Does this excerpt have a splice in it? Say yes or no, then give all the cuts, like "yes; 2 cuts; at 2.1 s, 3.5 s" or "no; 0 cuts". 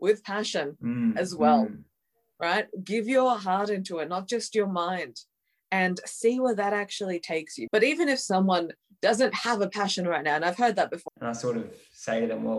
yes; 2 cuts; at 7.7 s, 11.1 s